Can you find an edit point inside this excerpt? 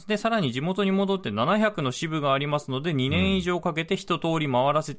no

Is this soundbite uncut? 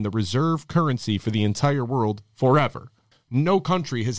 no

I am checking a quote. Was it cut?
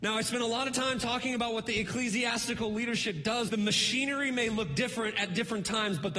yes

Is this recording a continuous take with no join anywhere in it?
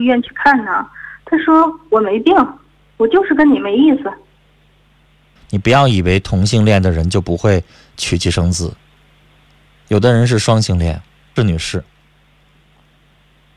no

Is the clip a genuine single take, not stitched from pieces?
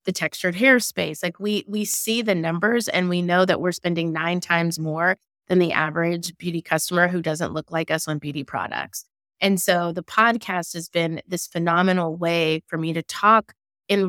yes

